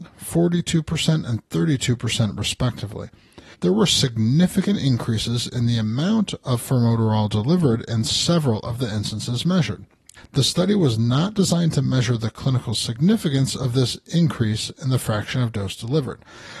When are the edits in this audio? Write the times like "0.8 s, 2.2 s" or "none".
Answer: 3.5 s, 10.2 s